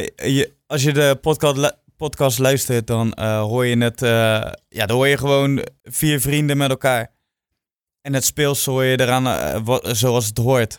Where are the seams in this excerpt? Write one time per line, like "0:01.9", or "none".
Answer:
0:05.8